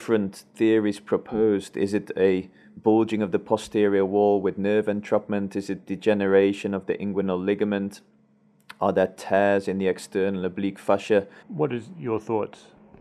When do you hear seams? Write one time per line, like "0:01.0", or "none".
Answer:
0:11.4